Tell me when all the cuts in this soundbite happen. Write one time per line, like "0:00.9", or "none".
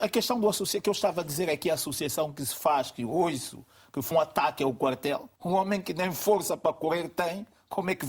0:04.1
0:05.4